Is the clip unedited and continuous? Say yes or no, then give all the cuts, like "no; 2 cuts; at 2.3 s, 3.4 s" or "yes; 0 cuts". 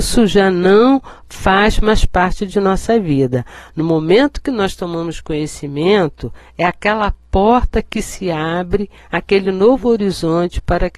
yes; 0 cuts